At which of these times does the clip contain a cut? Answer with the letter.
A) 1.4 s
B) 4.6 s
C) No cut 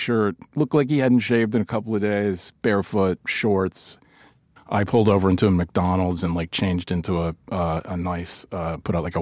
B